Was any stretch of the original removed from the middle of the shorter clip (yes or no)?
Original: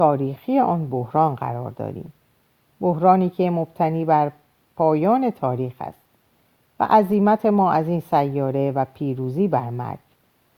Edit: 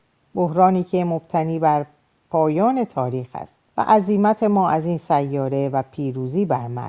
yes